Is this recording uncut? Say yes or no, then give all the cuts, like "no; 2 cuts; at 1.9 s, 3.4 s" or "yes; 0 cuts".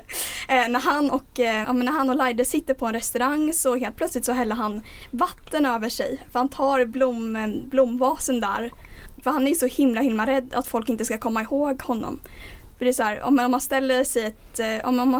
no; 1 cut; at 1.6 s